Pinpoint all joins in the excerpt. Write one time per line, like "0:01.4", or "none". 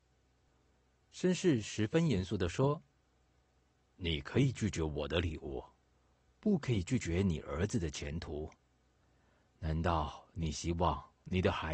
none